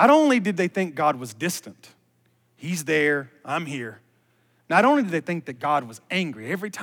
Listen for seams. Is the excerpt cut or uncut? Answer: uncut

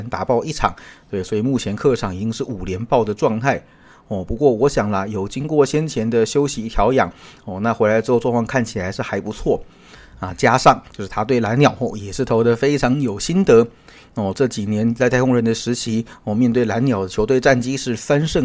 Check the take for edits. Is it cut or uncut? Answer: uncut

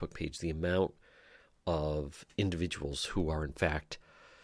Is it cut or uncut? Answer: uncut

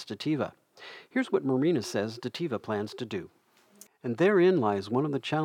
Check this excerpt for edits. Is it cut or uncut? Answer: cut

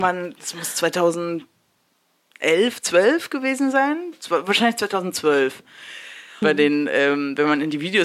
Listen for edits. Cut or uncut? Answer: cut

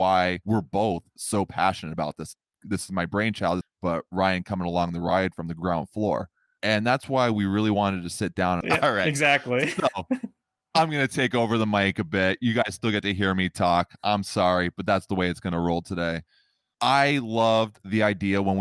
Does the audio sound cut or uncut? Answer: cut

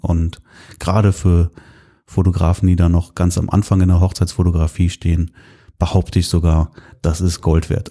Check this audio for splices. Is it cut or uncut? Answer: uncut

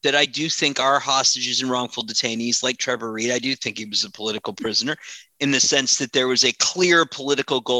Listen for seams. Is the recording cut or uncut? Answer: uncut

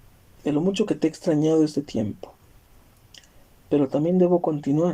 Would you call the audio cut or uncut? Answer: uncut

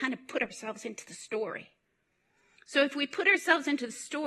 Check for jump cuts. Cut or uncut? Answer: uncut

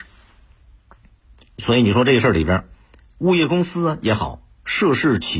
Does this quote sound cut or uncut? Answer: uncut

